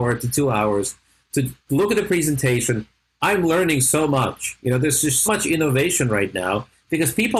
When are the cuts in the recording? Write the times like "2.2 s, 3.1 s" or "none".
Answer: 5.3 s